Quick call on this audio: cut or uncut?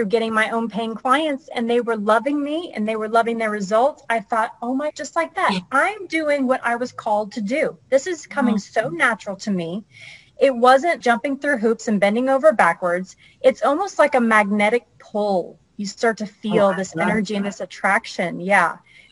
cut